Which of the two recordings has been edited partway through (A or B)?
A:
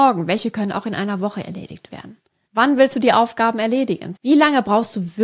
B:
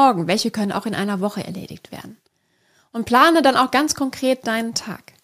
A